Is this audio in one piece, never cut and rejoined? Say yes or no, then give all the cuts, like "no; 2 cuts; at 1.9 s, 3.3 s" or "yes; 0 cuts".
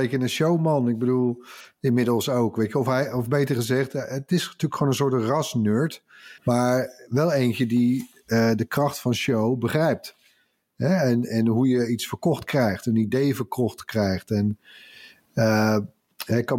no; 1 cut; at 6.4 s